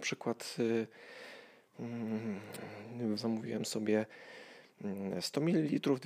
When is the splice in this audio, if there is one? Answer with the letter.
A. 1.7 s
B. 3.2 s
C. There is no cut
B